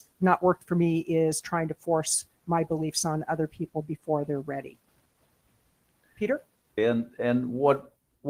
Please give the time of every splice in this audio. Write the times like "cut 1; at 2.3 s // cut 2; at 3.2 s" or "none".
cut 1; at 6.8 s